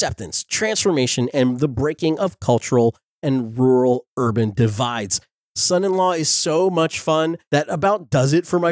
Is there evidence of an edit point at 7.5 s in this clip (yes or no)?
yes